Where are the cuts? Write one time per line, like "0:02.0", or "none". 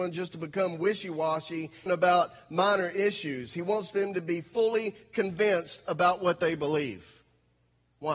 0:01.9